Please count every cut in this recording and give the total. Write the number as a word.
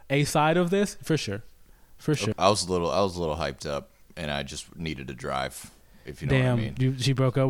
one